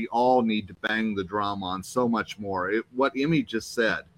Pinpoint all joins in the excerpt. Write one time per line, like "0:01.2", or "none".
none